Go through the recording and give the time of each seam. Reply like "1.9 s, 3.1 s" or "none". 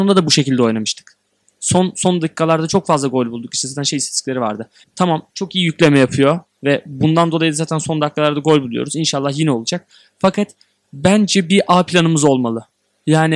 4.8 s